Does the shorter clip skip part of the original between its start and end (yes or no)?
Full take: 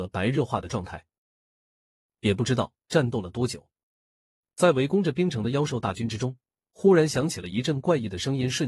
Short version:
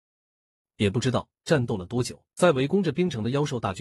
yes